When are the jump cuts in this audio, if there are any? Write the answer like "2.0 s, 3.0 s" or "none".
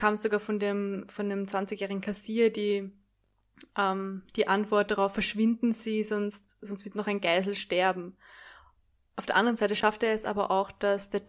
none